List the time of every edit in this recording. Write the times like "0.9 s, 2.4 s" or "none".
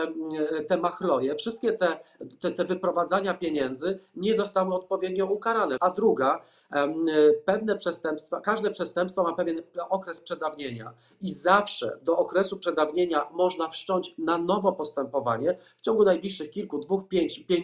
5.8 s